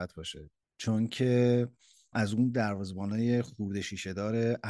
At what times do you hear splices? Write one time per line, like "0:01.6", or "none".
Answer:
0:02.1